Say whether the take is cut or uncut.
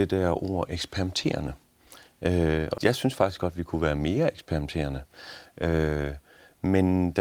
cut